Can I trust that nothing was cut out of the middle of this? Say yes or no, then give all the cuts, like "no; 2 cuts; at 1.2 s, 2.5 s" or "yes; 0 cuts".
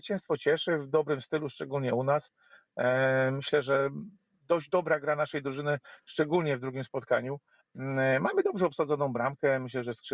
yes; 0 cuts